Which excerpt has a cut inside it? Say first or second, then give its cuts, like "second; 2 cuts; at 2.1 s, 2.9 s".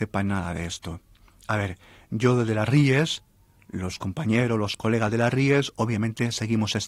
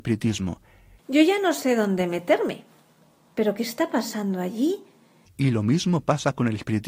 second; 2 cuts; at 0.9 s, 5.2 s